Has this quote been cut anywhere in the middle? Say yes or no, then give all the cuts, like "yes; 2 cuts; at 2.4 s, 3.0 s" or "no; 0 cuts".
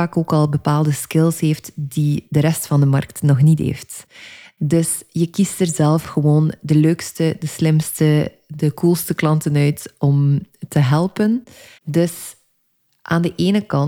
yes; 1 cut; at 11.8 s